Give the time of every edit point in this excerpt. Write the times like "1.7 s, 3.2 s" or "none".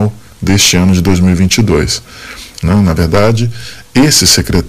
2.6 s